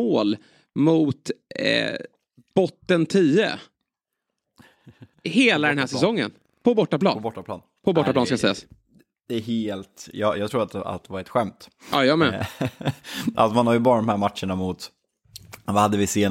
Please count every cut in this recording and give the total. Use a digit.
0